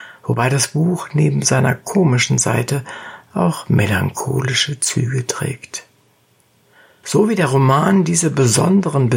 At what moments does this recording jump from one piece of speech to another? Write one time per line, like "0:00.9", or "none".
0:07.0